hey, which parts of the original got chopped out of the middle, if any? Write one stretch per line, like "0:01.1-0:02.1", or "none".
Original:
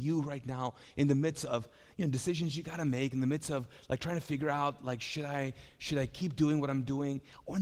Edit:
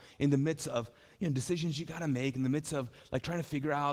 none